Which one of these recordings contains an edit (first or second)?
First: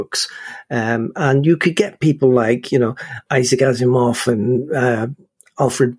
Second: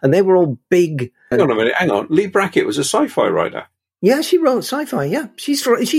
second